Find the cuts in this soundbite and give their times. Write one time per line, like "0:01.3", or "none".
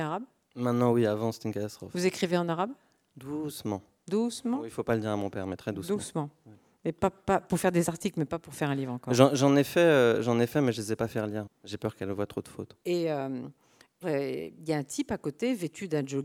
0:11.5
0:12.8
0:14.0